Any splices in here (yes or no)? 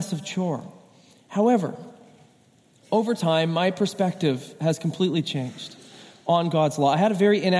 no